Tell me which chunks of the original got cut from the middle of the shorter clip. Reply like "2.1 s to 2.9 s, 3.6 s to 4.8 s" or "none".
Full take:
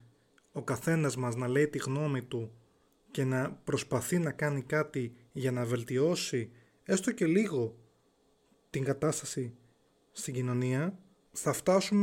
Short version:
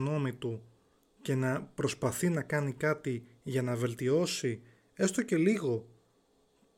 none

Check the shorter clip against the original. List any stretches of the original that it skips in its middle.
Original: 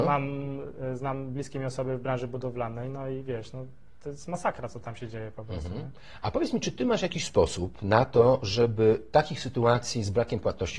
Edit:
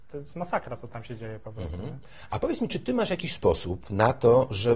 none

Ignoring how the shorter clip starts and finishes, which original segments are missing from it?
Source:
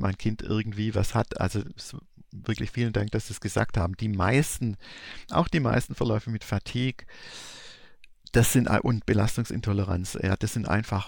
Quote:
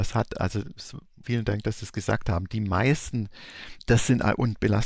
2.2 s to 2.7 s, 5.3 s to 8.2 s

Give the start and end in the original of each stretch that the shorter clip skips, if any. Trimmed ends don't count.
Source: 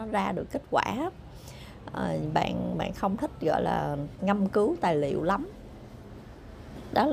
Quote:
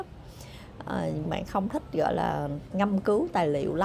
2.3 s to 2.7 s

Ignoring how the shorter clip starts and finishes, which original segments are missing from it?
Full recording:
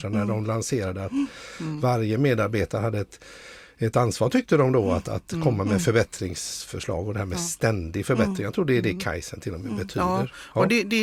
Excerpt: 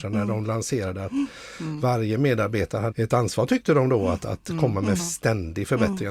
2.9 s to 3.7 s, 5.8 s to 7.4 s

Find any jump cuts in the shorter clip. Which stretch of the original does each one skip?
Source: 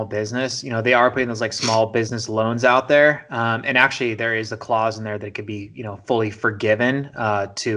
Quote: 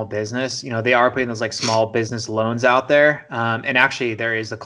none

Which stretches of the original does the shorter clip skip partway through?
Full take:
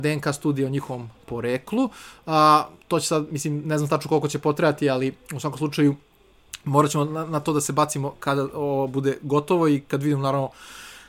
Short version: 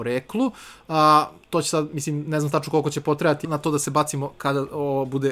4.8 s to 7.3 s

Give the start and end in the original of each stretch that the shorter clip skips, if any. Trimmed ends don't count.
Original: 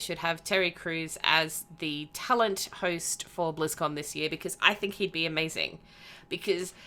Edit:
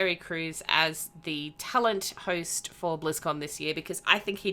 none

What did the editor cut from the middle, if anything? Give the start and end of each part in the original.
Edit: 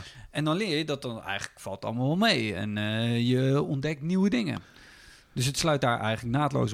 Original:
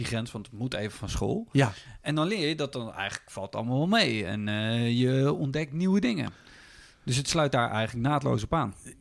none

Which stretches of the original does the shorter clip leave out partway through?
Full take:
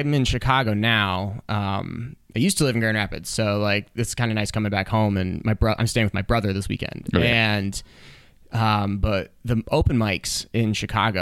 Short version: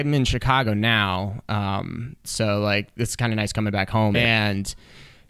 2.2 s to 3.2 s, 5.1 s to 7.2 s

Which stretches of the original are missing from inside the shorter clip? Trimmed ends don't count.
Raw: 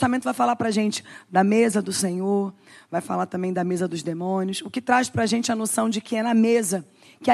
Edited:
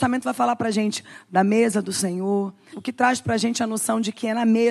2.7 s to 4.6 s

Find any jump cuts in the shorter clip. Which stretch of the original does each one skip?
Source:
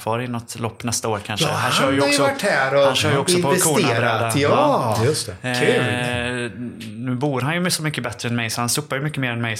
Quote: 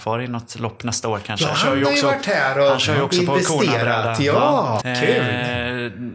1.5 s to 1.7 s, 5.0 s to 5.4 s

